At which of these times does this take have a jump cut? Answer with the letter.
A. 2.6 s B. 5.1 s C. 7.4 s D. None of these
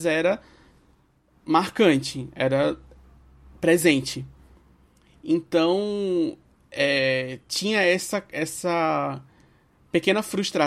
D